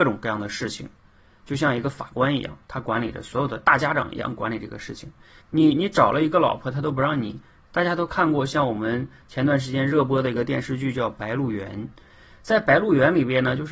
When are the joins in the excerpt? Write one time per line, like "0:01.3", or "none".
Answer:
0:05.4
0:07.6